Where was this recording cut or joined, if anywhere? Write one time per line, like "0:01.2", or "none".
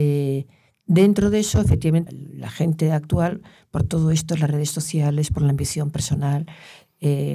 0:02.1